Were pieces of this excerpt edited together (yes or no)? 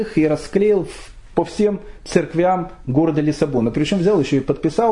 no